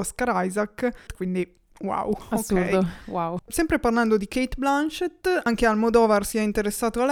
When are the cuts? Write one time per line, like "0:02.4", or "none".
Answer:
0:01.1
0:03.4